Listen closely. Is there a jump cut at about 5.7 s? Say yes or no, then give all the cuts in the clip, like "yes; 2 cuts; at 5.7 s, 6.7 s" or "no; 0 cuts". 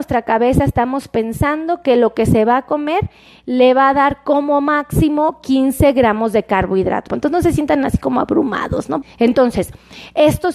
no; 2 cuts; at 7.1 s, 9.0 s